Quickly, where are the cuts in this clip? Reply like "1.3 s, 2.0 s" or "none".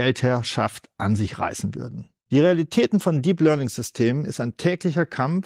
2.2 s